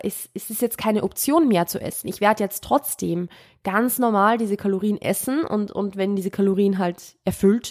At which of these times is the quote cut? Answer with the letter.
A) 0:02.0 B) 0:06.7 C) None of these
C